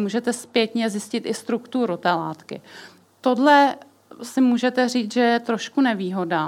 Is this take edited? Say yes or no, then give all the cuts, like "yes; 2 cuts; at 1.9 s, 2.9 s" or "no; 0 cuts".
yes; 1 cut; at 3.0 s